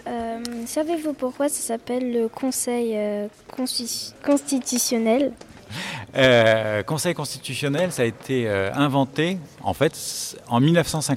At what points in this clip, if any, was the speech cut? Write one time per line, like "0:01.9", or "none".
0:04.2